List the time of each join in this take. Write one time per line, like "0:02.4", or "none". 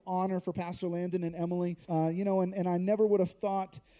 0:01.8